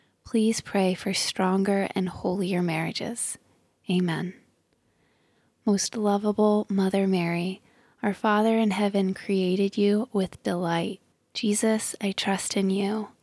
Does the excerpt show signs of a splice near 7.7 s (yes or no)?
no